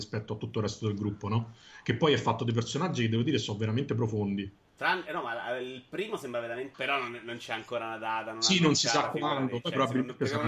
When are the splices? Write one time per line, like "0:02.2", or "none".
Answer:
0:06.7